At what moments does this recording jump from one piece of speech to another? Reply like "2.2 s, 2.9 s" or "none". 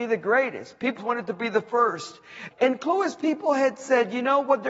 1.0 s, 2.5 s